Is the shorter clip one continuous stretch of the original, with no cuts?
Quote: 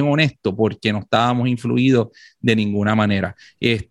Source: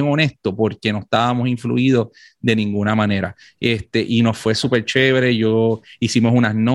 yes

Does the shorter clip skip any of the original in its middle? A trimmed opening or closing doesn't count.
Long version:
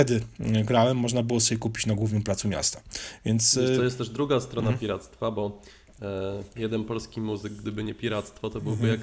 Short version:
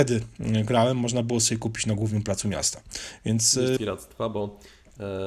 yes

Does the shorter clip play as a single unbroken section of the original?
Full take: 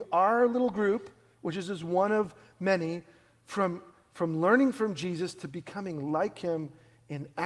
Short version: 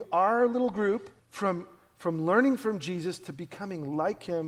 no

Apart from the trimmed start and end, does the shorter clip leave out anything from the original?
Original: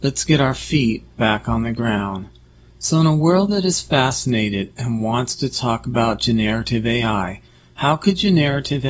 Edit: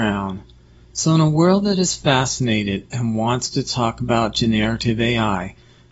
no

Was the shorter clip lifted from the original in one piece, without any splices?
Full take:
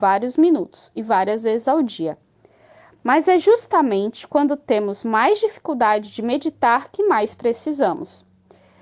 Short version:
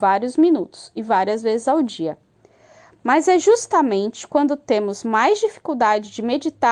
yes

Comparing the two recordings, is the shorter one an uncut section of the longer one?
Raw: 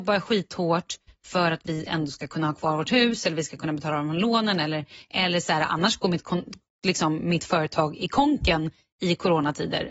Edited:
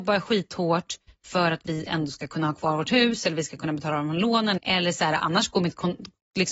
no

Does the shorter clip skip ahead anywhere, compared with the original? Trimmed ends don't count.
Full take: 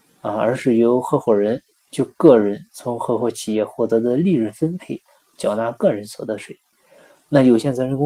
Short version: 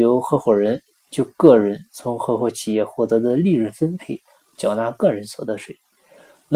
no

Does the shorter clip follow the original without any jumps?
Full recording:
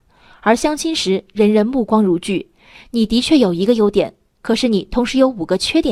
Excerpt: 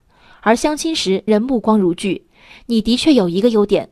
no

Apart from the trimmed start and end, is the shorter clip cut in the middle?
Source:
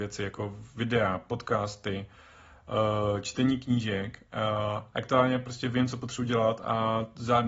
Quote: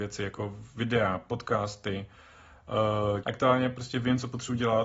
yes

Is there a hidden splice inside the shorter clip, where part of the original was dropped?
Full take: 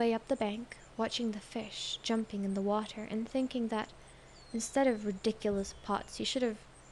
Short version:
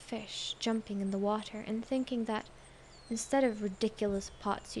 no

